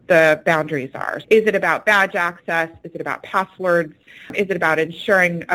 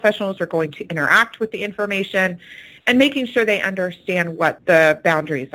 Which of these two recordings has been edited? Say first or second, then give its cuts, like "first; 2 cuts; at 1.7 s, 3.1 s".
first; 1 cut; at 1.2 s